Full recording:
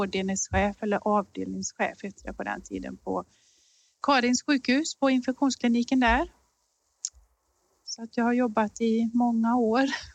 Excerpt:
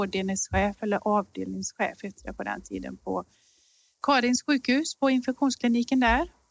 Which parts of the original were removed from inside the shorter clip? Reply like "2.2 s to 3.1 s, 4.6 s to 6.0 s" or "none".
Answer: none